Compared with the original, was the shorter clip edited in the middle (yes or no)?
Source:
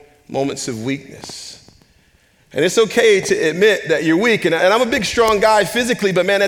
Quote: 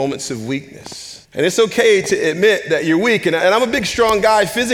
yes